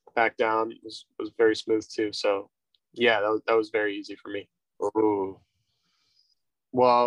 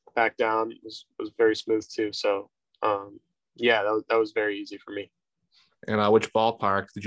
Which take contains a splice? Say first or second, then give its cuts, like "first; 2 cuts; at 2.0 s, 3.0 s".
first; 2 cuts; at 2.8 s, 4.7 s